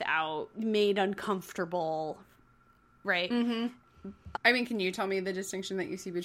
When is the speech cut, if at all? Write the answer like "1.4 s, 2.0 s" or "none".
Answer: 4.3 s